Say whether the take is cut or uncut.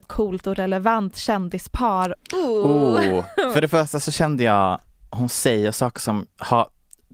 cut